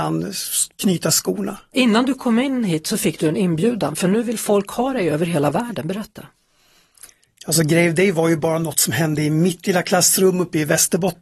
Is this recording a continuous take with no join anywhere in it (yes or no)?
no